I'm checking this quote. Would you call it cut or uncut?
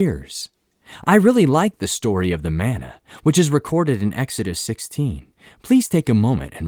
uncut